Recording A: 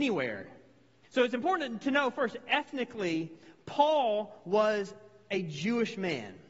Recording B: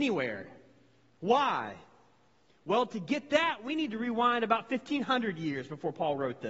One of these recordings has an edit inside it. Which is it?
A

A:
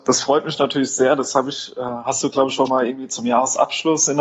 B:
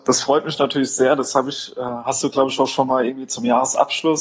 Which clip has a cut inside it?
A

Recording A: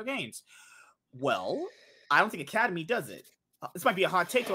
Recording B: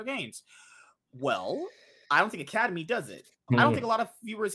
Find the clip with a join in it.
B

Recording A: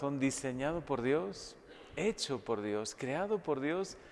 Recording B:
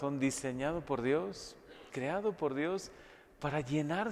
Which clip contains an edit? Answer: B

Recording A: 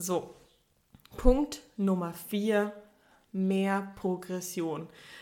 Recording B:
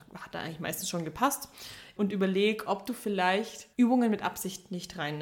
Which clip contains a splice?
B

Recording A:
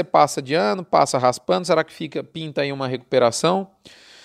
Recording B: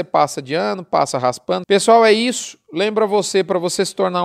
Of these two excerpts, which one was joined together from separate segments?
B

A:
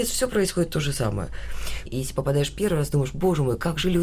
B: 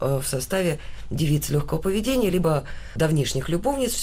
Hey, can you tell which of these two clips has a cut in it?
A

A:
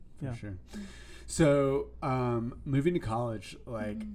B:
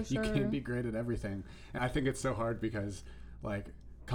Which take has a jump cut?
B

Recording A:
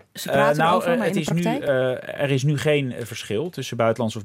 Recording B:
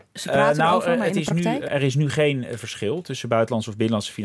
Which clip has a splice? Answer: B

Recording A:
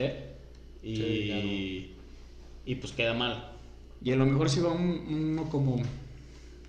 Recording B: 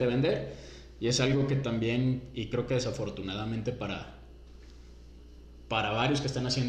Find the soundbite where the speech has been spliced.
A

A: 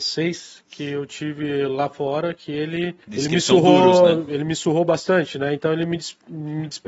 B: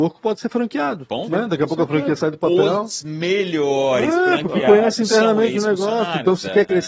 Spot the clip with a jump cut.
A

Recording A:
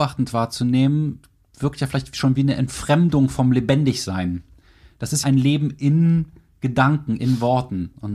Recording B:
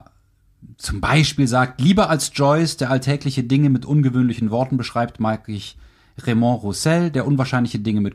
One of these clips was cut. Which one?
A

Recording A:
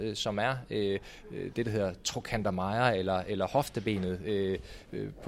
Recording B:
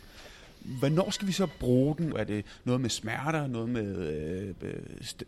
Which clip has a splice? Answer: B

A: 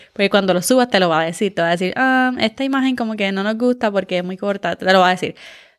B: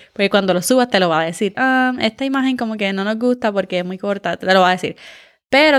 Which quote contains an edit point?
B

